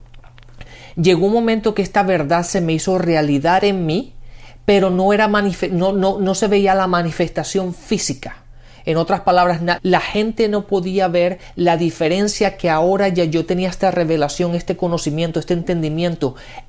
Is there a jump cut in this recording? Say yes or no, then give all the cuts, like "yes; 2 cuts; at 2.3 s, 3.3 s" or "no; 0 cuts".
yes; 1 cut; at 9.8 s